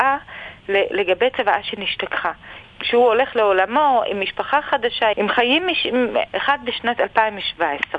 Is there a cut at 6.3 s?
yes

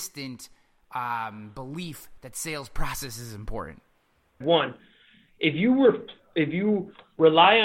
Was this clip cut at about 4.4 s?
yes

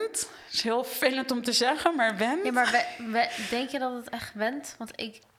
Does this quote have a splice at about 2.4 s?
no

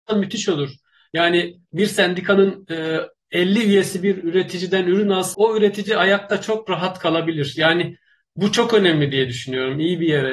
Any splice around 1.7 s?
yes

